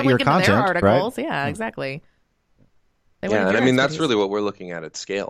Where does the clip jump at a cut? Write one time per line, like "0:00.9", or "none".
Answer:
none